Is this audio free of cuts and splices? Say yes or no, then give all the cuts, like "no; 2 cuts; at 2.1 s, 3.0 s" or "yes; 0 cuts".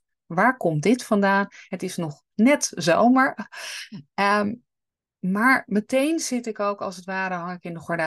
yes; 0 cuts